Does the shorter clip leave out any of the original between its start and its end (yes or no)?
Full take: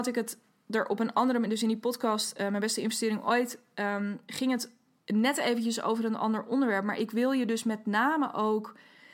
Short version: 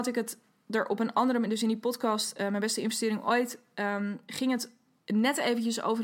no